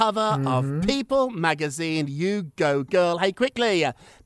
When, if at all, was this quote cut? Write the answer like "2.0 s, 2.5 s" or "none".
none